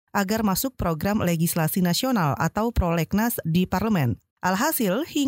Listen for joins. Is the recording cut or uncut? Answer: cut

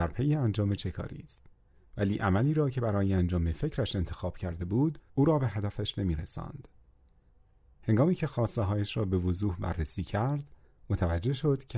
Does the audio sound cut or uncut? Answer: cut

